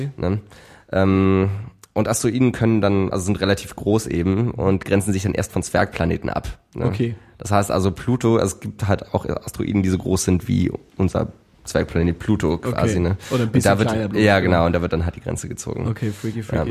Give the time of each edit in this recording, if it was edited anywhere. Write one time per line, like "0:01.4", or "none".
none

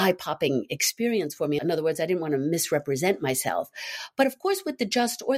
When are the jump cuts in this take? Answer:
0:01.6

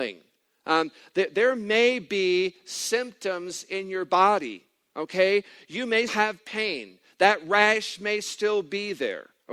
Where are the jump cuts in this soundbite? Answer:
0:06.1

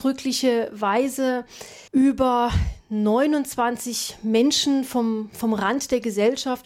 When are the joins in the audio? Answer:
0:01.9

